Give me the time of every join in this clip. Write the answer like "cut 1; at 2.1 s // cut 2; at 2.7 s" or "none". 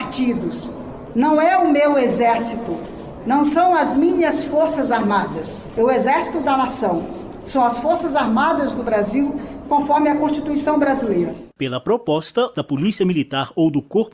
cut 1; at 12.5 s